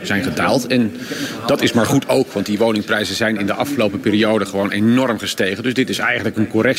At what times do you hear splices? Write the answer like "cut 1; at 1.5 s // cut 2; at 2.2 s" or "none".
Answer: none

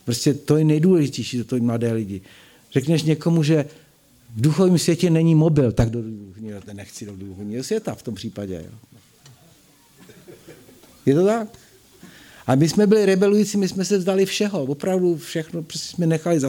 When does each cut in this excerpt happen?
none

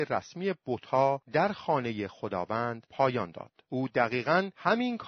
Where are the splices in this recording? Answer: none

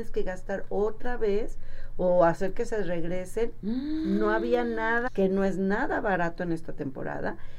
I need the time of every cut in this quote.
cut 1; at 3.6 s // cut 2; at 5.1 s

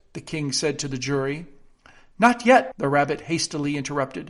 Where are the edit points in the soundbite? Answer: cut 1; at 2.7 s

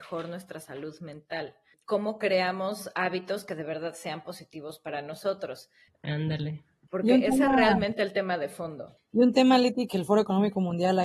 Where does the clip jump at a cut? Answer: cut 1; at 5.9 s // cut 2; at 9.9 s

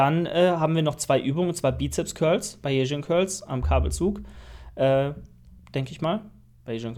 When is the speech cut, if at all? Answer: none

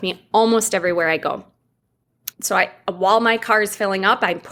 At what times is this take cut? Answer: cut 1; at 2.3 s

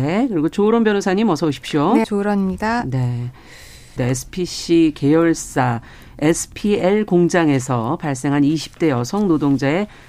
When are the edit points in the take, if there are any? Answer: cut 1; at 2.0 s // cut 2; at 4.0 s

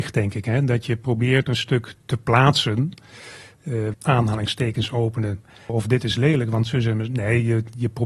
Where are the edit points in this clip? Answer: cut 1; at 3.9 s // cut 2; at 5.7 s

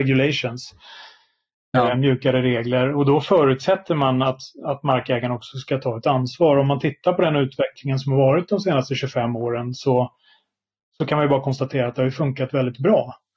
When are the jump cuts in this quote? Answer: none

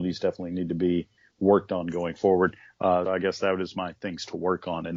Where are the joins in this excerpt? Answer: cut 1; at 3.1 s

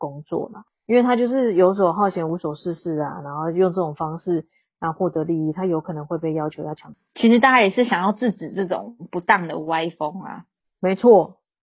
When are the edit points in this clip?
none

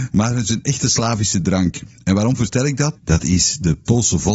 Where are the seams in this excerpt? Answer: cut 1; at 3.0 s

